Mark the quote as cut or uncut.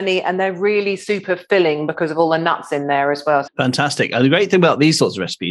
cut